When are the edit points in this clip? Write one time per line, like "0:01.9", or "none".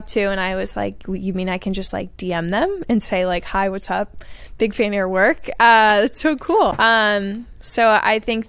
0:06.7